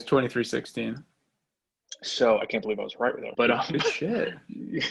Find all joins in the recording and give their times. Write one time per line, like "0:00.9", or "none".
0:03.3